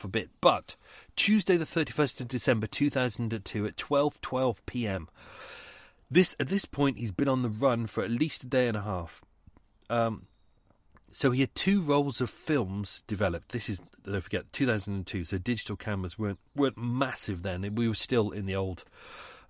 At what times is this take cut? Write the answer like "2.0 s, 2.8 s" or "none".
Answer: 16.5 s

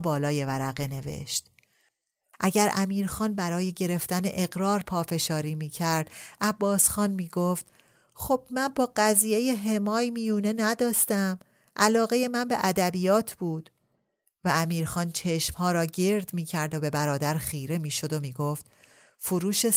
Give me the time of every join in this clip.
2.3 s

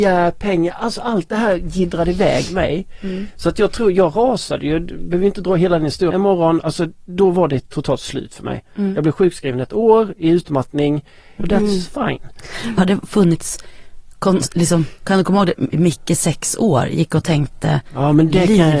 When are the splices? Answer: 6.1 s, 11.4 s, 12.8 s

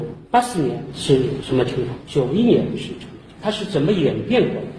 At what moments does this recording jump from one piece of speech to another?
none

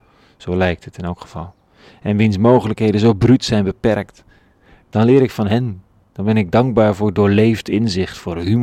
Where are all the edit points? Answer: none

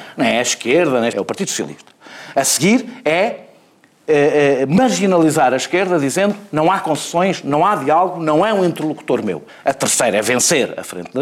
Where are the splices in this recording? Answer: 1.1 s, 9.5 s

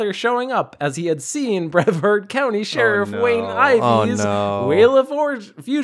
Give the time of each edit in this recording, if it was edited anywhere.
none

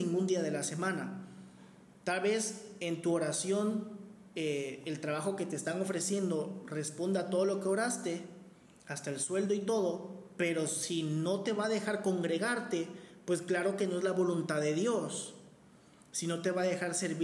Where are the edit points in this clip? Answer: none

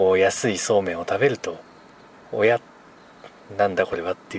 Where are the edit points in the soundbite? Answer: none

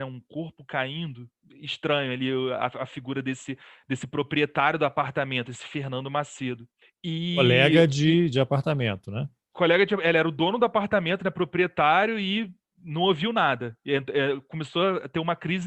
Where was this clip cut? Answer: none

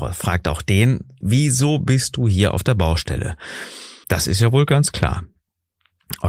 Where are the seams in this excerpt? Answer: 1.2 s, 4.0 s

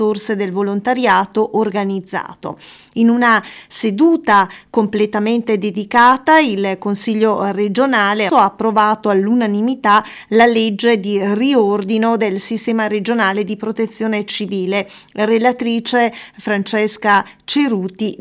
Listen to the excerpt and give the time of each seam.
8.3 s

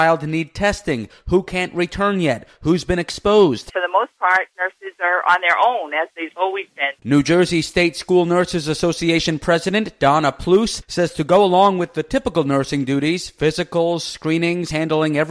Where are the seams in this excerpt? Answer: 7.0 s

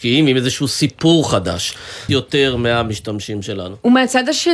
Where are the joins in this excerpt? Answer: 2.1 s

